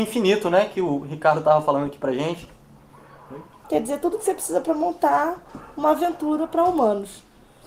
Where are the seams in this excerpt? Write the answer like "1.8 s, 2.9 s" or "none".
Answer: 3.6 s